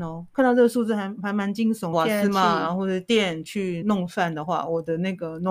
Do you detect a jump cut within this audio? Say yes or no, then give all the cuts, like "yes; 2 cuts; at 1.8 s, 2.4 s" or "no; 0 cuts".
yes; 2 cuts; at 1.9 s, 3.8 s